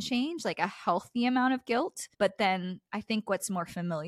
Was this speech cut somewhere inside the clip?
no; 0 cuts

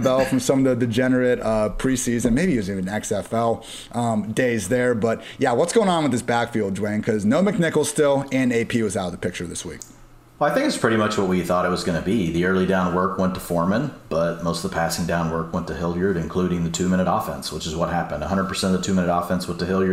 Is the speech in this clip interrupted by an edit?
no; 0 cuts

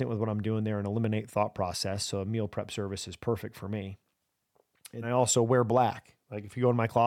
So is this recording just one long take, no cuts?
no; 1 cut; at 5.0 s

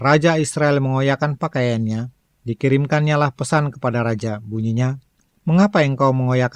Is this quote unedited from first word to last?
yes; 0 cuts

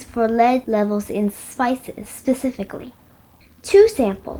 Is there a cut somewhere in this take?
no; 0 cuts

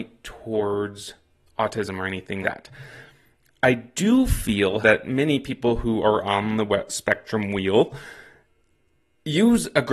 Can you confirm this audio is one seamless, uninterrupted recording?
no; 2 cuts; at 2.4 s, 4.8 s

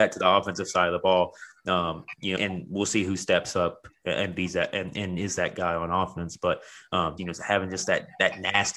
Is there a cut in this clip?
yes; 2 cuts; at 2.4 s, 7.2 s

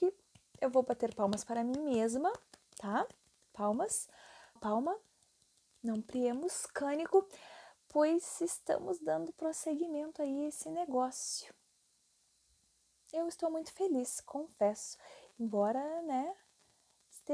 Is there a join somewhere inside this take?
yes; 1 cut; at 4.6 s

